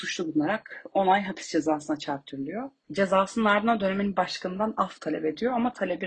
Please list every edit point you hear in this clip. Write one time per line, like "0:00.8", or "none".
0:02.8

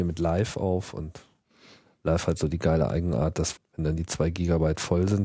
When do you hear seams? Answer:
0:03.6

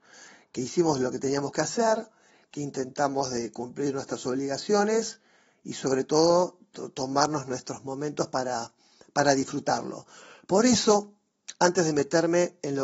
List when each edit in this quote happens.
none

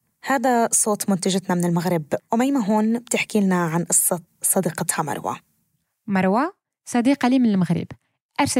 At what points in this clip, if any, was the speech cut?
0:02.2

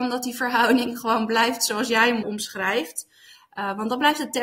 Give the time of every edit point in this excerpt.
none

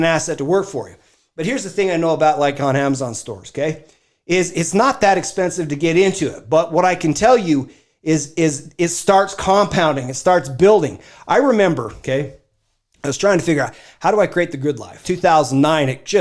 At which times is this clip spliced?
0:12.0
0:15.0

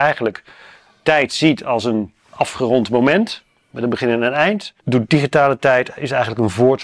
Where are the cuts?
0:04.8

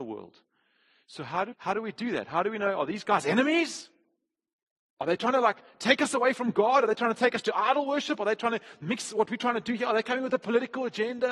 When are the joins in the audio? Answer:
0:01.5

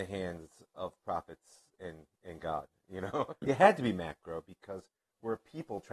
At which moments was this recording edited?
0:03.4

